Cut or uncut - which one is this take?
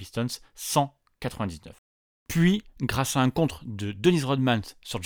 uncut